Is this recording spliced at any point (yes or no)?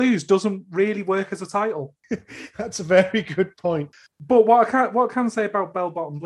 no